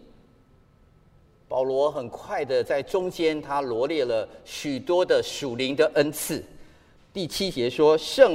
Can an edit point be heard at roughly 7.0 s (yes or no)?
yes